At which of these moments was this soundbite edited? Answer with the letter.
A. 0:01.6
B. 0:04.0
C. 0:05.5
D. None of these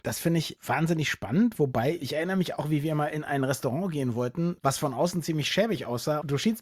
D